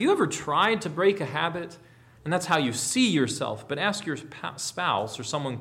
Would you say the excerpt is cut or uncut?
cut